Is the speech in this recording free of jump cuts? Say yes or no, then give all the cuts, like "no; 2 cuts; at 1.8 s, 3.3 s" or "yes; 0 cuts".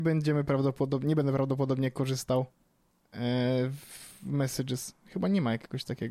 yes; 0 cuts